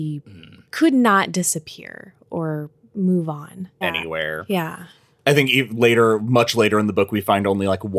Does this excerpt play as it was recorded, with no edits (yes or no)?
no